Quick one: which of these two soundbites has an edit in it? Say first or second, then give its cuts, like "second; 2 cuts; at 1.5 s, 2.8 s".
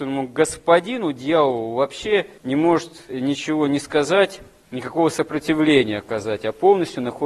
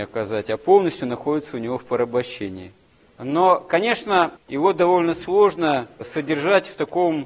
second; 2 cuts; at 3.0 s, 4.4 s